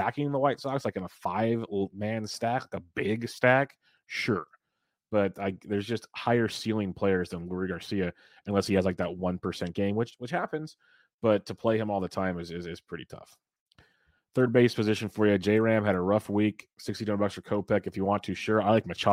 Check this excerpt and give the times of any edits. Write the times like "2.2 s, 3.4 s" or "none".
none